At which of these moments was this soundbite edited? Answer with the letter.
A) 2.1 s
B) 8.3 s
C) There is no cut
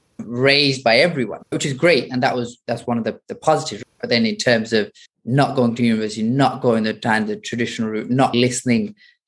B